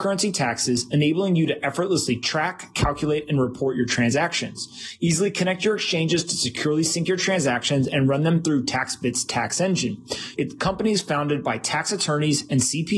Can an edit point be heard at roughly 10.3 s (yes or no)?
yes